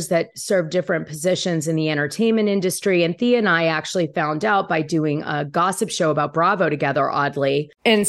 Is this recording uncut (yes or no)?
yes